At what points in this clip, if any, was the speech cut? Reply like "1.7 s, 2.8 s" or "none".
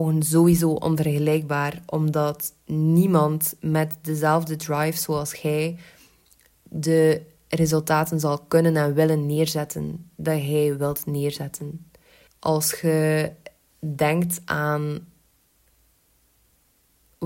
12.3 s